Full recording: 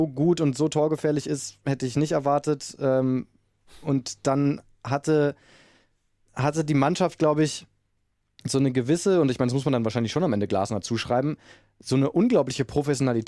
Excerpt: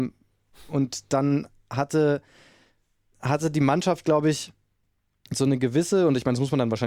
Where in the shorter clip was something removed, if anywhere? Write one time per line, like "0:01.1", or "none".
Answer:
none